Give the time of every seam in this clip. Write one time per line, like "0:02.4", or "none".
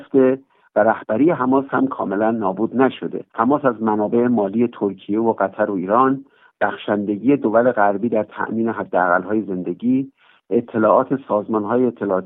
0:03.3

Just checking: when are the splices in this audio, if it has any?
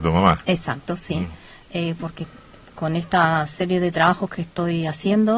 none

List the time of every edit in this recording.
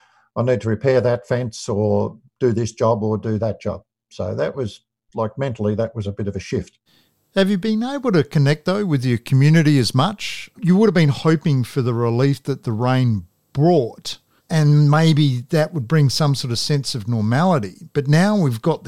none

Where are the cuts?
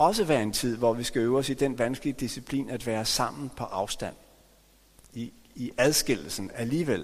none

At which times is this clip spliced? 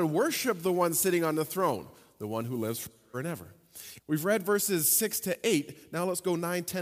0:04.0

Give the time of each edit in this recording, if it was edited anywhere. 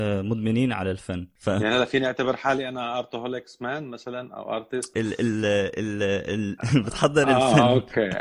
0:04.9
0:06.6

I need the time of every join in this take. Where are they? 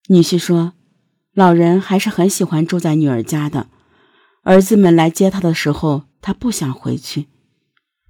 0:06.1

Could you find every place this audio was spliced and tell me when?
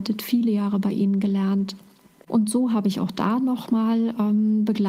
0:02.3

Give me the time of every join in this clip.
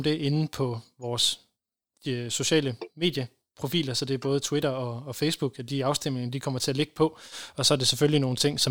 none

